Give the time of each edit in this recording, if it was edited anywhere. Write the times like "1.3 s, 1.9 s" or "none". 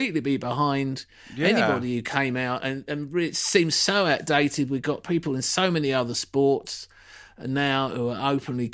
none